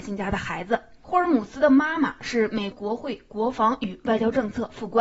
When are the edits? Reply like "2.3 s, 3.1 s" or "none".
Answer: 2.7 s